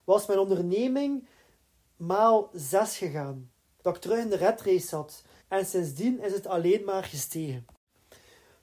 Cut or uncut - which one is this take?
cut